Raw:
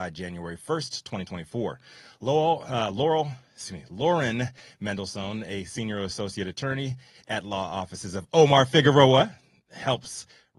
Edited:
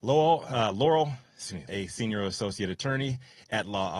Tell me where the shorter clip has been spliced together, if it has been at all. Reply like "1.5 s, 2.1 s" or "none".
1.7 s